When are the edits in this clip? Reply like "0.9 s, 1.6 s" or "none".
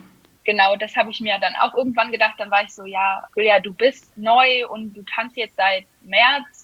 3.3 s